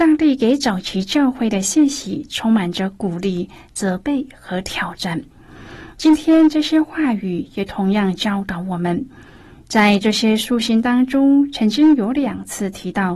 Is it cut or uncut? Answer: uncut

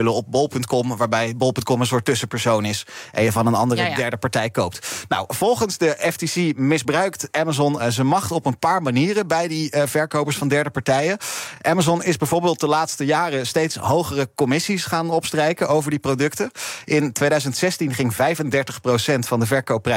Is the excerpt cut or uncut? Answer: uncut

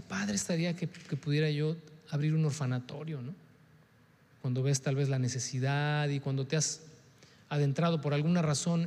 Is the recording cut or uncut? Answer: uncut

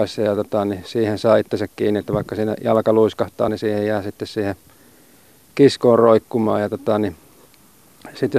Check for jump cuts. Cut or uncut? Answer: uncut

